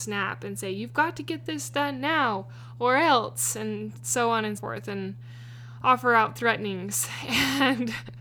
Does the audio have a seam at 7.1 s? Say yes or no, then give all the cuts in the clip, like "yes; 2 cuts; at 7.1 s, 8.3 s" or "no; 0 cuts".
no; 1 cut; at 4.6 s